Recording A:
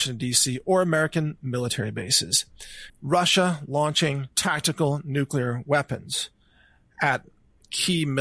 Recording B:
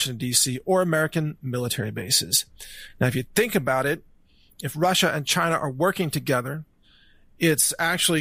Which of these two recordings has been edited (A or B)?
A